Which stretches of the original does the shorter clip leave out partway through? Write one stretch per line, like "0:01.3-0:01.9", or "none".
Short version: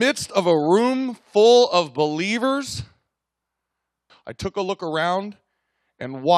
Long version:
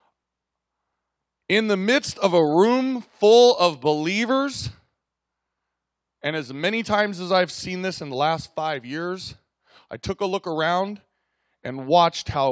0:06.0-0:09.7